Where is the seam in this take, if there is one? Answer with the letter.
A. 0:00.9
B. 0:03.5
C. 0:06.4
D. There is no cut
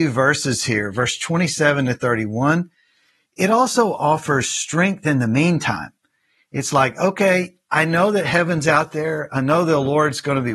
D